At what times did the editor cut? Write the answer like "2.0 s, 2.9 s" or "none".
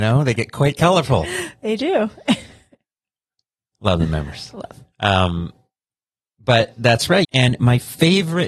4.9 s, 7.2 s